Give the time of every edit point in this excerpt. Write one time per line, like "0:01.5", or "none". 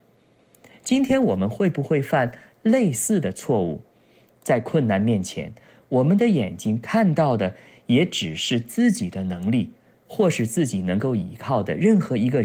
none